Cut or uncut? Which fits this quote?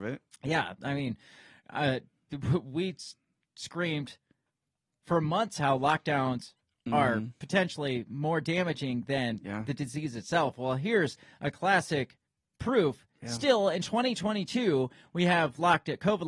uncut